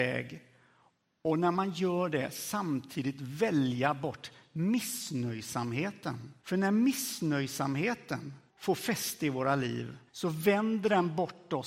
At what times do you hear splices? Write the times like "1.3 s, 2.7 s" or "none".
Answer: 6.4 s, 8.5 s, 10.1 s